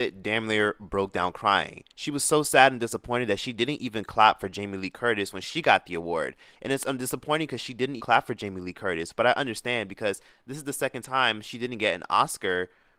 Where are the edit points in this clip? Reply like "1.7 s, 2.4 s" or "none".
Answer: 6.5 s, 8.0 s